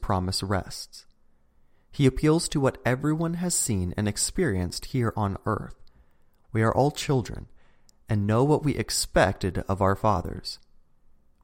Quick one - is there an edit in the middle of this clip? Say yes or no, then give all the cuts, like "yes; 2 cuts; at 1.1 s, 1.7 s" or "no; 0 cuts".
no; 0 cuts